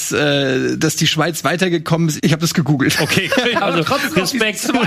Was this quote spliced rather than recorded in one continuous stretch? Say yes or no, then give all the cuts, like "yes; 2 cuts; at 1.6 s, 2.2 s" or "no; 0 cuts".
yes; 2 cuts; at 2.2 s, 3.5 s